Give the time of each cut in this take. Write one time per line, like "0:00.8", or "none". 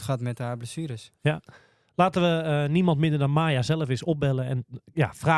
none